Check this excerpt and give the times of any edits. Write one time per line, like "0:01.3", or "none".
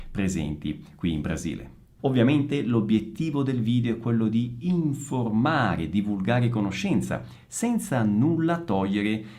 0:02.0